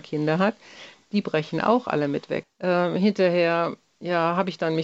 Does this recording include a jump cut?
yes; 1 cut; at 2.4 s

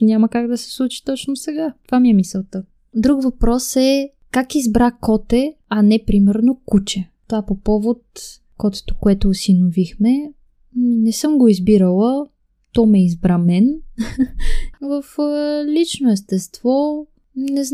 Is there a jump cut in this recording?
yes; 1 cut; at 14.7 s

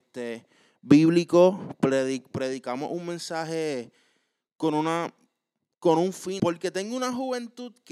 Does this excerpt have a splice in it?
yes; 1 cut; at 6.4 s

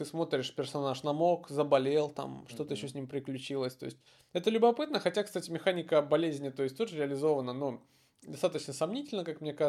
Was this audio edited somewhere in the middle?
no; 0 cuts

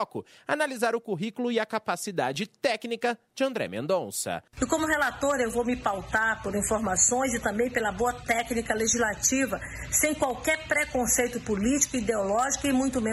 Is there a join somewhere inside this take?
no; 0 cuts

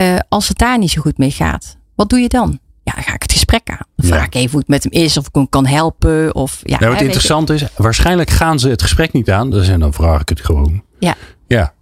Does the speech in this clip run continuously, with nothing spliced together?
yes; 0 cuts

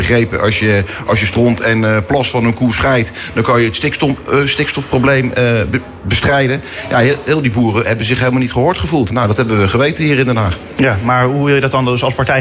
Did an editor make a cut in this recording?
no; 0 cuts

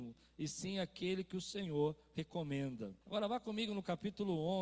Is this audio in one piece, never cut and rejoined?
no; 1 cut; at 3.0 s

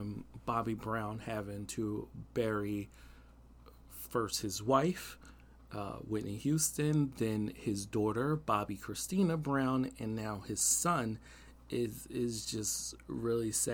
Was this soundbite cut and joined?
no; 0 cuts

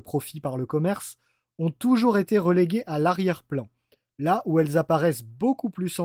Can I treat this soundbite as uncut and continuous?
yes; 0 cuts

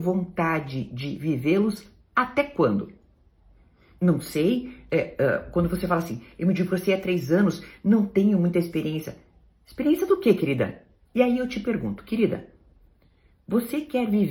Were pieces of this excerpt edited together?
yes; 1 cut; at 11.1 s

